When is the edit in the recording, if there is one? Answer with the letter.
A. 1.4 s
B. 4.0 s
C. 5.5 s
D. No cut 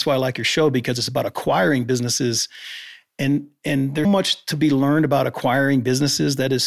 B